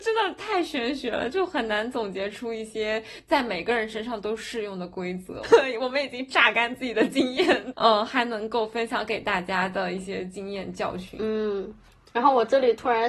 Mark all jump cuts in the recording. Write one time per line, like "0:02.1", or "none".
0:05.4
0:07.7